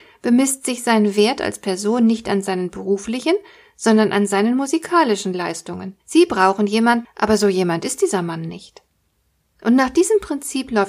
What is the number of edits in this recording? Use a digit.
2